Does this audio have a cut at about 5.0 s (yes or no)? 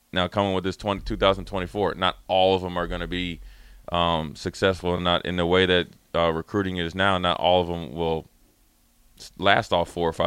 no